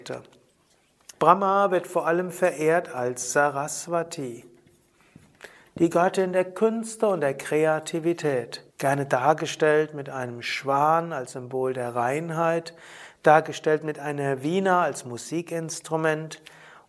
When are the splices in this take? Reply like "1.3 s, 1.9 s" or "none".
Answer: 1.1 s, 8.7 s